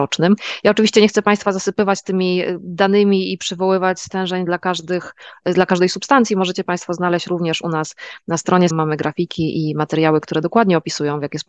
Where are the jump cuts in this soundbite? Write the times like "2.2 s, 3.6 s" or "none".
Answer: 8.7 s